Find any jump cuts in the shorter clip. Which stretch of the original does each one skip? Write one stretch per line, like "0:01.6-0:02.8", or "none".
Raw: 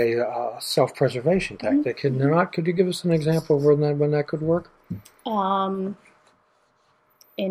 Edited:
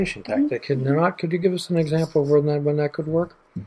none